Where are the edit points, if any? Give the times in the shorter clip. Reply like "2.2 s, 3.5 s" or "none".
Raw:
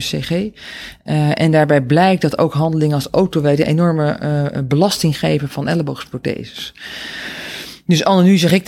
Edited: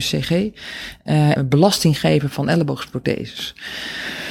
1.4 s